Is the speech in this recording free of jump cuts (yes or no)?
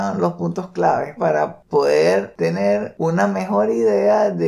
no